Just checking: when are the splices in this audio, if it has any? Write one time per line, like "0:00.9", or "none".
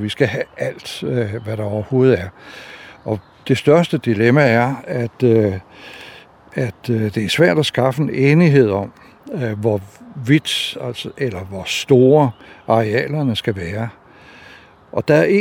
none